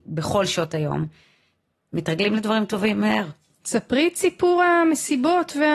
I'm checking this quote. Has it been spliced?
yes; 1 cut; at 3.5 s

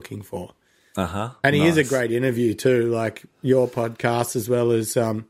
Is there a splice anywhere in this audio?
no; 0 cuts

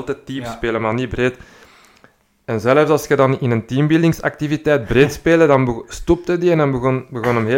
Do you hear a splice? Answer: no; 0 cuts

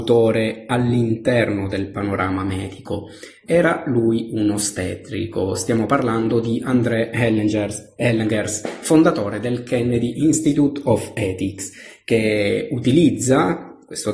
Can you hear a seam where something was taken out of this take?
no; 0 cuts

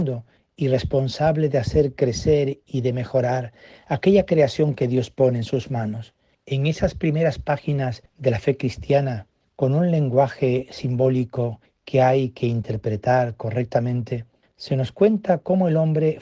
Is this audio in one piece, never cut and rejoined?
no; 1 cut; at 6.3 s

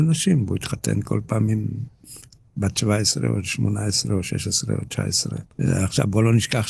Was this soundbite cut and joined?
yes; 1 cut; at 5.5 s

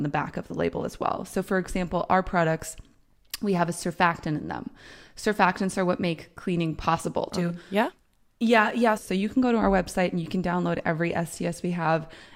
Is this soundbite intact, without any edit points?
no; 2 cuts; at 7.3 s, 9.0 s

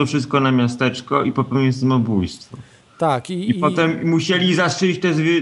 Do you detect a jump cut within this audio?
no; 0 cuts

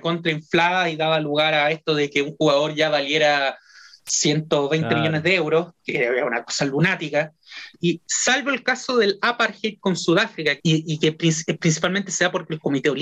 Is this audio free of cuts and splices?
no; 2 cuts; at 7.7 s, 10.6 s

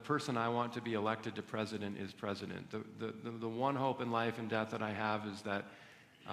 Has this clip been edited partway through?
no; 0 cuts

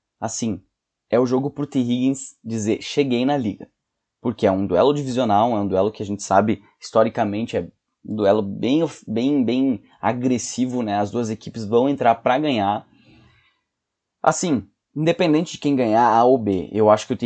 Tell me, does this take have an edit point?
no; 0 cuts

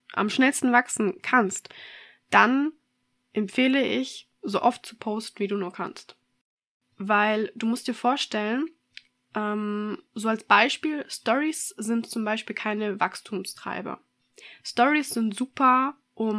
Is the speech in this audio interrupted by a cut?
yes; 1 cut; at 10.1 s

